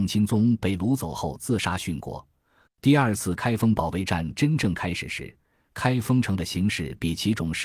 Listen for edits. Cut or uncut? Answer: cut